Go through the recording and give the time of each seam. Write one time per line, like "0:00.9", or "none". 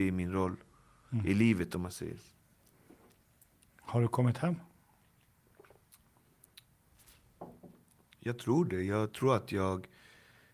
none